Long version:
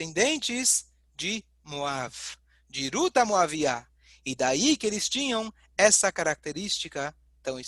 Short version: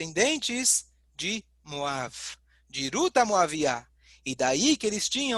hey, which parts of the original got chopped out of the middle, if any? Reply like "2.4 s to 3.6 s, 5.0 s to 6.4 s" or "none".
none